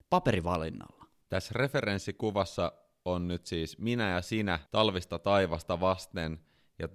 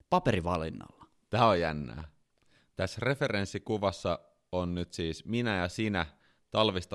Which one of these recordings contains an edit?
first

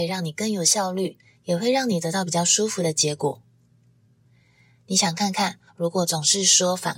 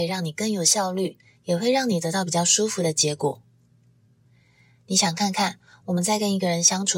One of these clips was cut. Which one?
first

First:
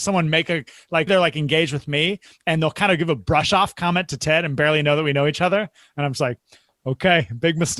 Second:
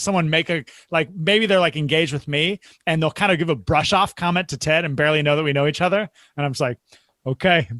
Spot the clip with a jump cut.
first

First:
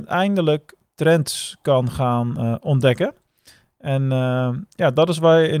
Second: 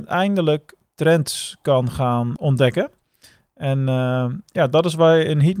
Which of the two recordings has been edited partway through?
second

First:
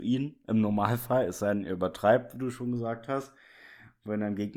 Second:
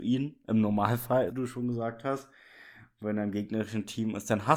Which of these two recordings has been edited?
second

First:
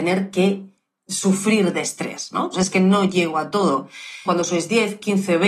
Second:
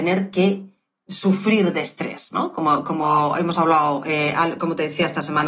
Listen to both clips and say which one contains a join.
first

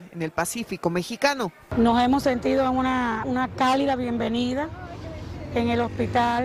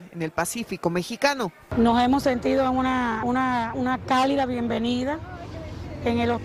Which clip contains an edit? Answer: first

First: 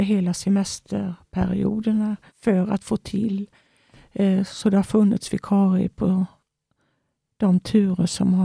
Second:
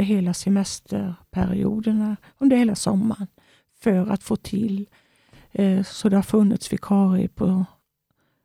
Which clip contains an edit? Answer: first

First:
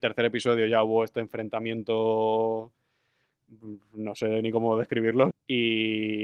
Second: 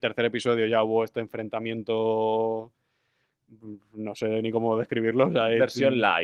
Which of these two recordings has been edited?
first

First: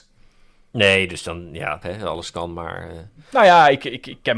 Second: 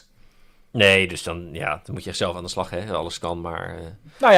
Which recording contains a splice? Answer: first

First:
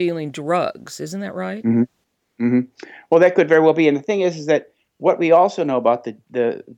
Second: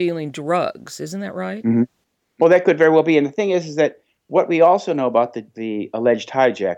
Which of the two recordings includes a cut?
second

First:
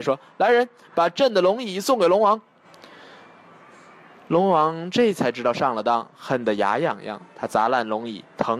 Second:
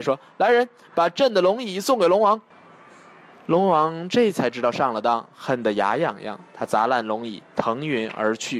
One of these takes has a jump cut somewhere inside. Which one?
second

